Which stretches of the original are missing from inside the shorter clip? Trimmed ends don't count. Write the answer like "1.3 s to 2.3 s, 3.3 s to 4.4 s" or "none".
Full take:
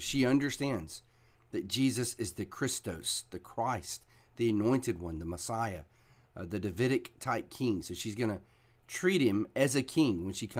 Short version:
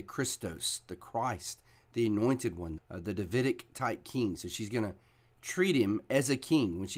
5.2 s to 6.2 s